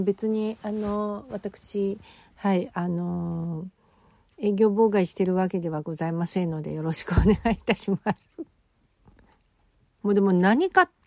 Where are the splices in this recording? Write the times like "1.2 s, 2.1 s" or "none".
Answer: 10.0 s